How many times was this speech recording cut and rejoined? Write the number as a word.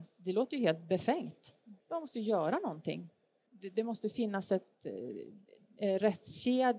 two